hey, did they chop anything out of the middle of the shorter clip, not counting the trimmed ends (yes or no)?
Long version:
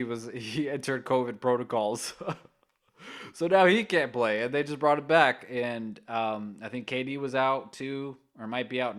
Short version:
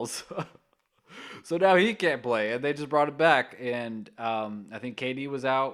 no